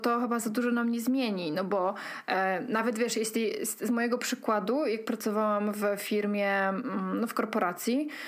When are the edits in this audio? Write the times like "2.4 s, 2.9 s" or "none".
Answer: none